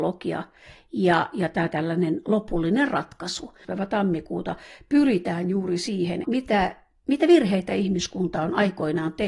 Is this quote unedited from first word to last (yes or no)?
no